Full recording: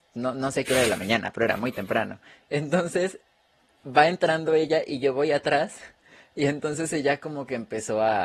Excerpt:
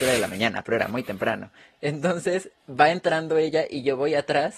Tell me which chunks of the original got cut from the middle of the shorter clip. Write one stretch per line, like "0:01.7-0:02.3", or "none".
0:03.3-0:03.7